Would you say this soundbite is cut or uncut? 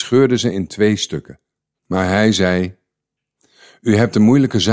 cut